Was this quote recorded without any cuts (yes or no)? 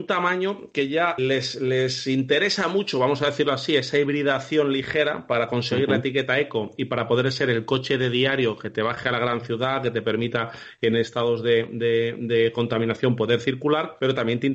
no